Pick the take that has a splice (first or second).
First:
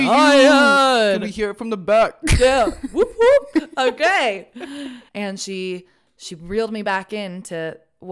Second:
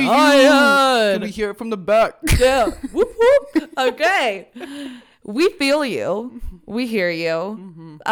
first